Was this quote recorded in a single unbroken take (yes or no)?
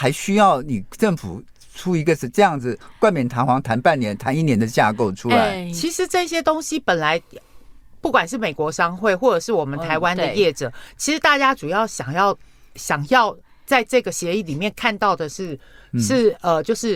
yes